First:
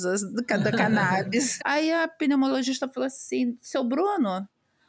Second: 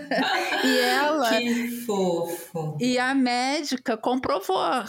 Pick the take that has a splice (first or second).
first